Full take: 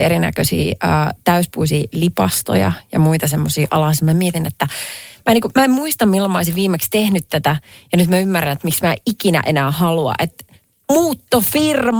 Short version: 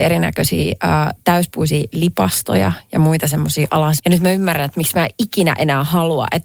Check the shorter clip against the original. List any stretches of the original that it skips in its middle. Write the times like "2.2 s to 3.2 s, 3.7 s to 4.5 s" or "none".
4.0 s to 7.9 s